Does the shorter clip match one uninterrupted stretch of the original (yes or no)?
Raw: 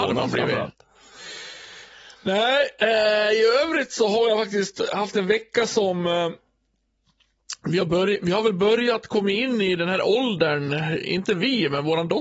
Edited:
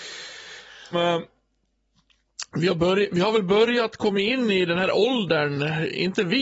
no